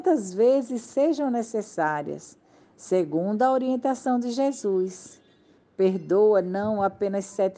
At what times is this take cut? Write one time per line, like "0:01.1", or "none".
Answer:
none